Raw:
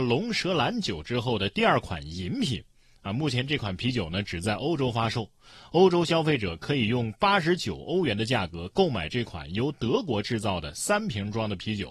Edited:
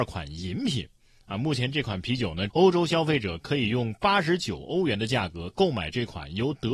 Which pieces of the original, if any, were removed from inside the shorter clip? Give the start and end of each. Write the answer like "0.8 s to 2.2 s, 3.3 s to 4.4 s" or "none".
4.3 s to 5.7 s

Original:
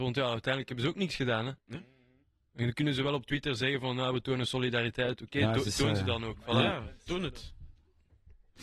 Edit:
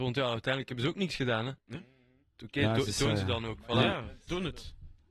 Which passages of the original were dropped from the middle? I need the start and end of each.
2.4 s to 5.2 s

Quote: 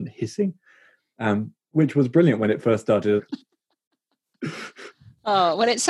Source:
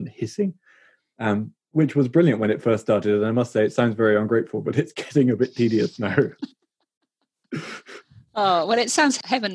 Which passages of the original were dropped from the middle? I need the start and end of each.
3.2 s to 6.3 s

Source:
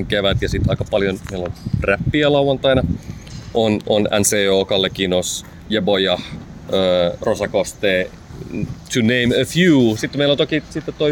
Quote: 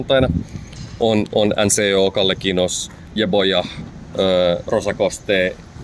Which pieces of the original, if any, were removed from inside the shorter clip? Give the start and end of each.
none

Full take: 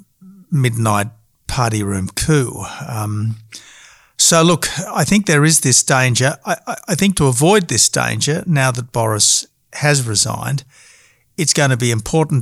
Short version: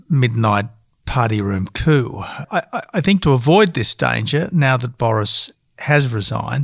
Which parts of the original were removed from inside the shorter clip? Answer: 2.9 s to 6.4 s

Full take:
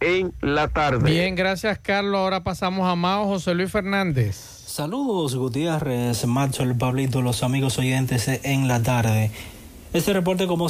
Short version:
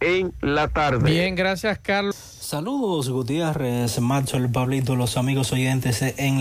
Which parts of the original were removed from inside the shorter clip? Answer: 2.1 s to 4.4 s

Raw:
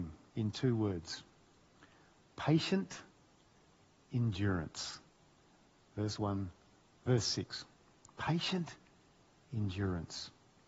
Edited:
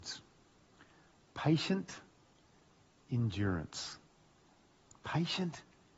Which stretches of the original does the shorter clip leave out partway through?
5.9 s to 8.0 s

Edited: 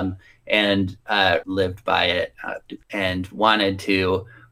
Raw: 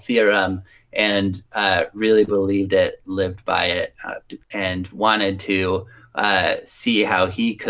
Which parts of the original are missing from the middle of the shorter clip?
1.9 s to 3.0 s

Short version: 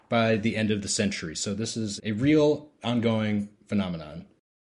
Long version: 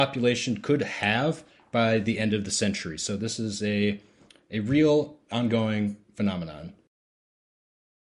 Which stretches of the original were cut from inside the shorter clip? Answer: 3.6 s to 4.4 s

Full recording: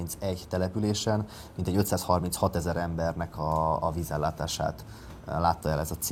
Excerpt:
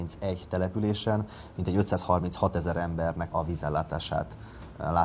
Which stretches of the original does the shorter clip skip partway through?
3.3 s to 3.8 s

